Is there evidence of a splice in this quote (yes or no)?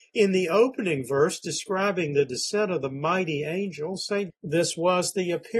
yes